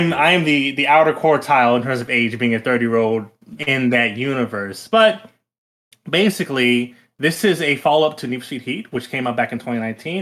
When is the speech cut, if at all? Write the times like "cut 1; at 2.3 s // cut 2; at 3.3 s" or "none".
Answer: cut 1; at 3.6 s